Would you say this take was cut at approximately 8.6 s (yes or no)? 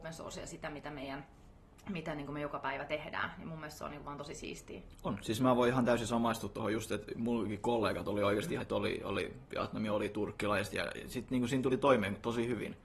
yes